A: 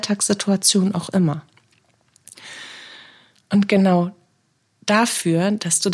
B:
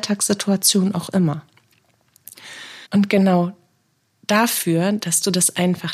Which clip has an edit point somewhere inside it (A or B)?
B